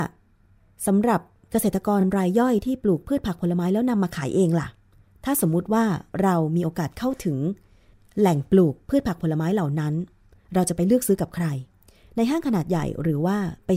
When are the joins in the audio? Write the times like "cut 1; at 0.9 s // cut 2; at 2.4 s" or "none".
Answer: none